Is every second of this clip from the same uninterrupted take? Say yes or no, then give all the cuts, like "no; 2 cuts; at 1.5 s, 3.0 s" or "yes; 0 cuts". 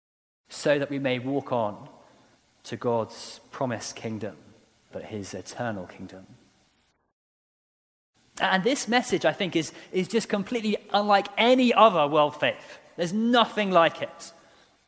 no; 1 cut; at 4.9 s